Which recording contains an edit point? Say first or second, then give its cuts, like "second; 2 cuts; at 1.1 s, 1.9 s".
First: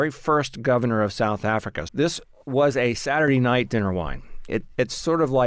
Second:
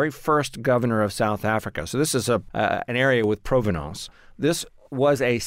first; 2 cuts; at 1.9 s, 4.5 s